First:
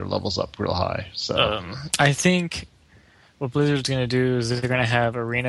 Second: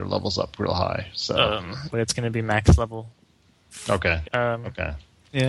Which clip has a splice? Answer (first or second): second